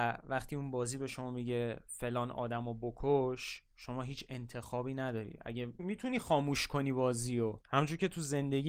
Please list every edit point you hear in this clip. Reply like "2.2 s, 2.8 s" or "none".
5.8 s